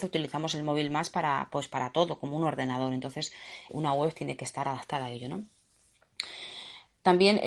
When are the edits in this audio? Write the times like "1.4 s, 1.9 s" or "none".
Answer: 3.7 s